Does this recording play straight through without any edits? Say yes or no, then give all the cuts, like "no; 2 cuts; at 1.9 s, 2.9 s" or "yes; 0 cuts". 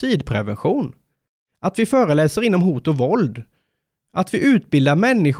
yes; 0 cuts